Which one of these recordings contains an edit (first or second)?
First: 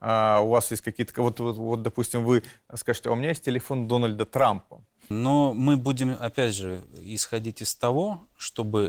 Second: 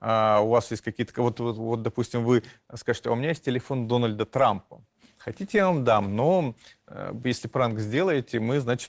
first